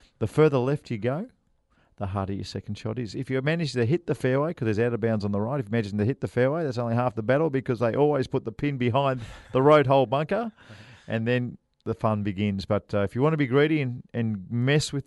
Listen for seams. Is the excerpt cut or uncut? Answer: uncut